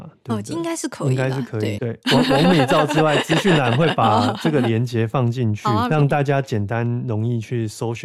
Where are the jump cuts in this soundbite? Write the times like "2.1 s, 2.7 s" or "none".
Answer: 1.8 s, 5.9 s